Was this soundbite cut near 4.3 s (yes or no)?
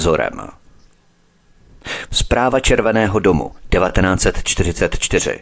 no